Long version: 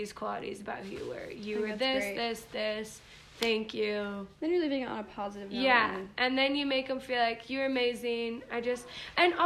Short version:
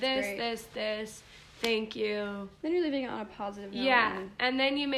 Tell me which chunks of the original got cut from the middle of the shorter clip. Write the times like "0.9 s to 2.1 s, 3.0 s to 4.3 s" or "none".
none